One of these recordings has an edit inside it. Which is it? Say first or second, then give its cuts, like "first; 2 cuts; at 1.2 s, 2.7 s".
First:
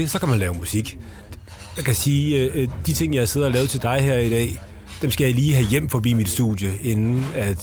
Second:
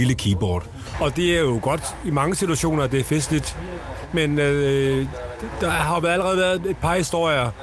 second; 1 cut; at 0.9 s